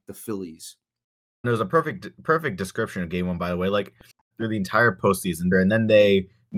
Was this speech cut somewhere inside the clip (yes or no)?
yes